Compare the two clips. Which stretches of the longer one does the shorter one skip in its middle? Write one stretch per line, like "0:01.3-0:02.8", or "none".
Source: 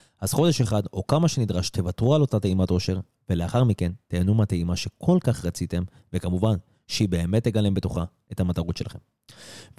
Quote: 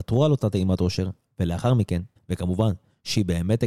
0:04.1-0:06.0